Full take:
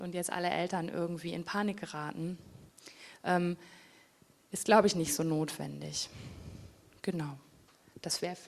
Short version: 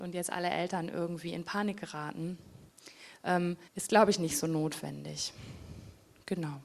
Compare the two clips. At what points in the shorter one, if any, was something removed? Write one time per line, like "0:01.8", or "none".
0:03.7